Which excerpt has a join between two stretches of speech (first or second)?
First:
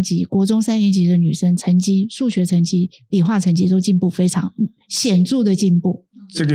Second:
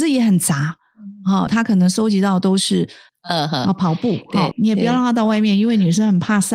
second